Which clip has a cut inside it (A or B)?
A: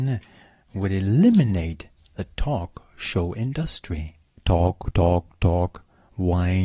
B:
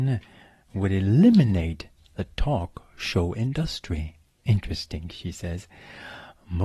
A